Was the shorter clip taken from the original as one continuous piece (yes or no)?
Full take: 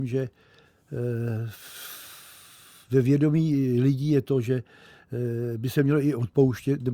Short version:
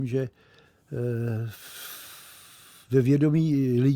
yes